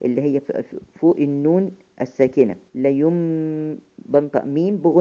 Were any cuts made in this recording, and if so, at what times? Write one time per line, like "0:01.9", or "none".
0:02.7